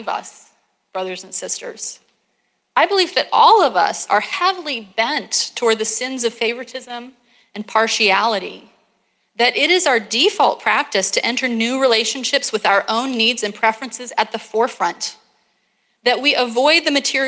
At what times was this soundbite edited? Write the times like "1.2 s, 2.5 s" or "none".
none

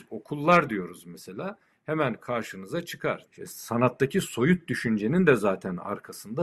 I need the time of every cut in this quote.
3.3 s

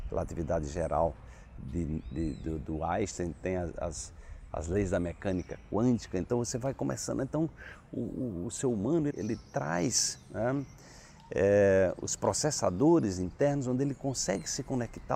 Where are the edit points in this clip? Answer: 9.1 s

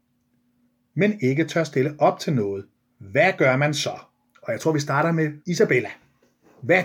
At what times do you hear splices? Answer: 2.9 s, 5.4 s

